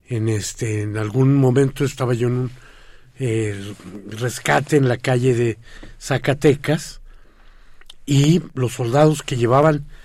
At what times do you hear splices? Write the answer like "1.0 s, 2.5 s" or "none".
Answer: none